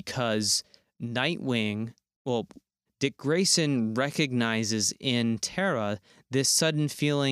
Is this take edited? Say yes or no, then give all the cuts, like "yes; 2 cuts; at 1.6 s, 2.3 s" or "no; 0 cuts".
yes; 1 cut; at 2.9 s